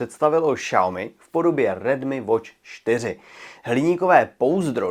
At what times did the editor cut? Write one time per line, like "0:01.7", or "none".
0:03.6

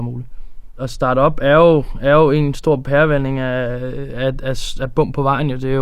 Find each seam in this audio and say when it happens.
none

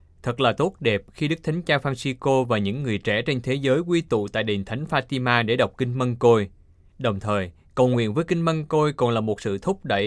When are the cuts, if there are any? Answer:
0:06.9

